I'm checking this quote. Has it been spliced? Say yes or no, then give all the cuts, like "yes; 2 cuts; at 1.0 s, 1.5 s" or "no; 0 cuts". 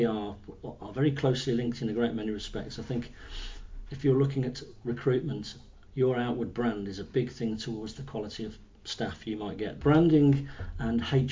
yes; 2 cuts; at 5.9 s, 9.8 s